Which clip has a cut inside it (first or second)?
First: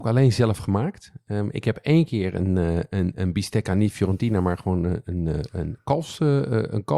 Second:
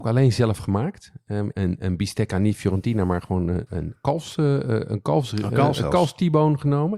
second